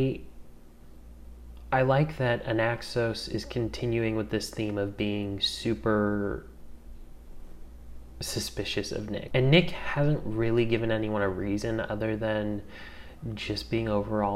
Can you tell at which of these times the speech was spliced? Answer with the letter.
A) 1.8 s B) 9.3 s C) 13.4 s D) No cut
B